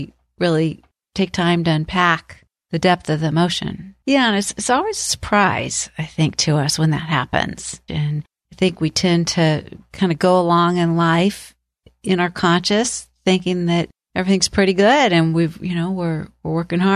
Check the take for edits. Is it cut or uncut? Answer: cut